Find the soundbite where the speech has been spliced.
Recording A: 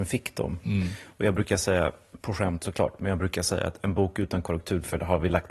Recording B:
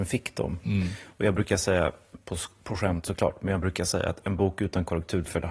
A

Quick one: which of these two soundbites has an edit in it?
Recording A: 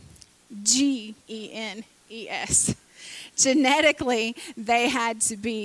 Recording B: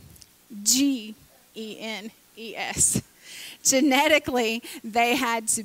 A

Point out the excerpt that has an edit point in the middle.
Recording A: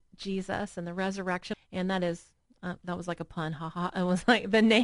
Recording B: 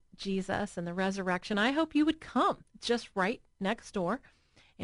A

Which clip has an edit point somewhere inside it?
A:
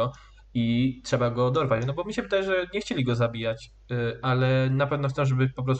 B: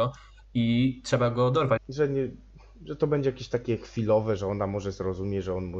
B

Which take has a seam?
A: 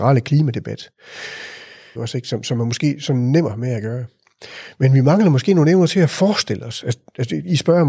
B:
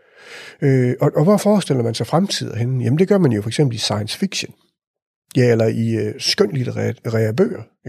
A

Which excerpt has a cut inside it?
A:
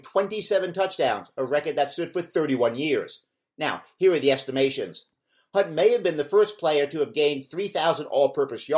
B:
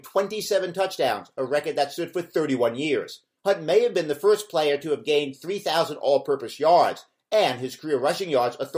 B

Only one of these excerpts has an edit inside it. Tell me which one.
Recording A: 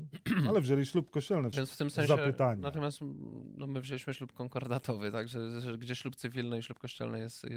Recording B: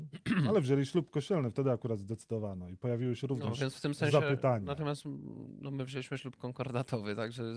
A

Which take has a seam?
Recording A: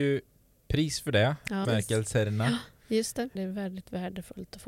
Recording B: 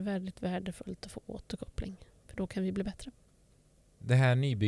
A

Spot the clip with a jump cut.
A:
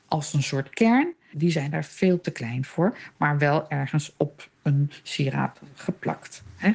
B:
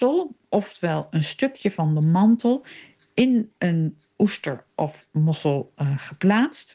A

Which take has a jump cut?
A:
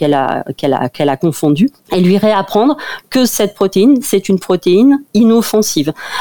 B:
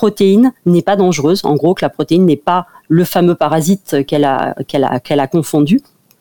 A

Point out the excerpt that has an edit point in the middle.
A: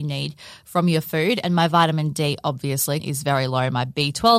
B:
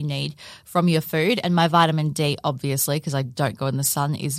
A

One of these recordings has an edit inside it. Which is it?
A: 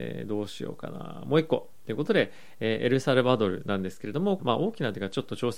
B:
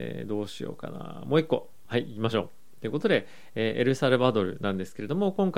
A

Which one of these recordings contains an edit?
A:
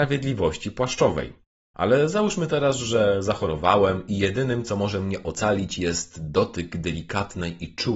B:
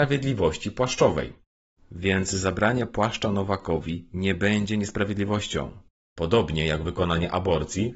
A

